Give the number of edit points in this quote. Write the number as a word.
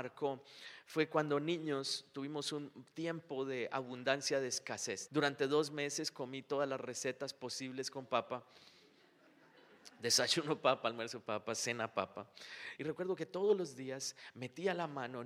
two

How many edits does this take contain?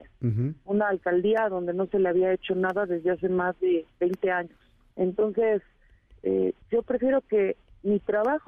two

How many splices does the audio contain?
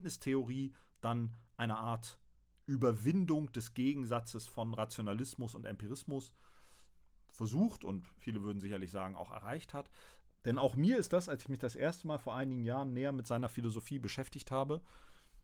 one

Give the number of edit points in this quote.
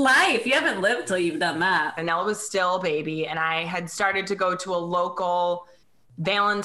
one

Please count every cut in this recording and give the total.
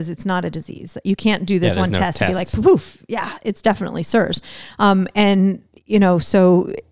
zero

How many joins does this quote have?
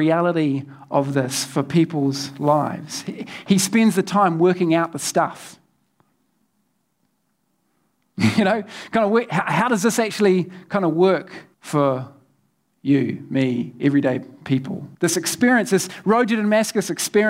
two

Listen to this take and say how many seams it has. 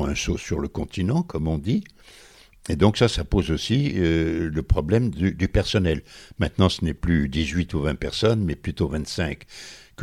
zero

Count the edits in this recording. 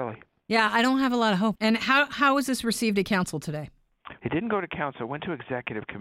two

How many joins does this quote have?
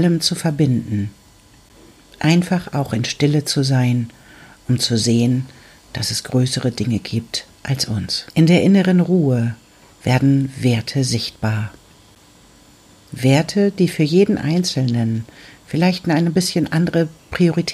two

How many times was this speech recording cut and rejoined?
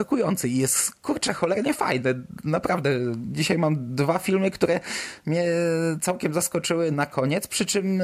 one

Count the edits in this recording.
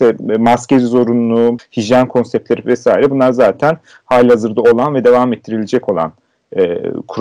one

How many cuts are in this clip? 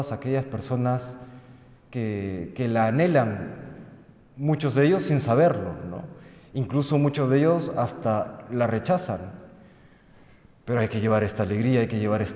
zero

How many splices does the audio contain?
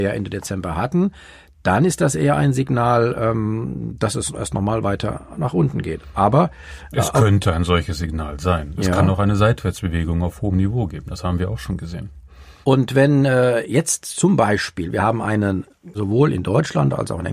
two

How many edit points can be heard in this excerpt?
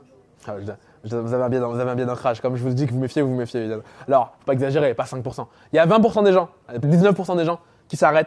two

